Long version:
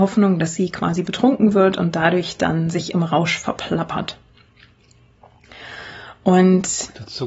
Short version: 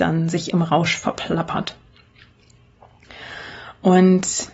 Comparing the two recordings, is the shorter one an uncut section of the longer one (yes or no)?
yes